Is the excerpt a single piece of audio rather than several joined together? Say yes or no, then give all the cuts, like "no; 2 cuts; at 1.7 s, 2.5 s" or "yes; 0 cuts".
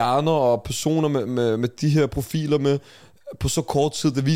yes; 0 cuts